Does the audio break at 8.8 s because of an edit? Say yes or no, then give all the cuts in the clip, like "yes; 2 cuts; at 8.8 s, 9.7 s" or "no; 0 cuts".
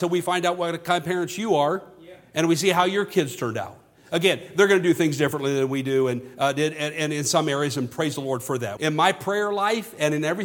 yes; 1 cut; at 8.8 s